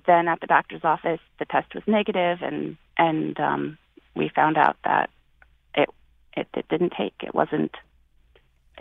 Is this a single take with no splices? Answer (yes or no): no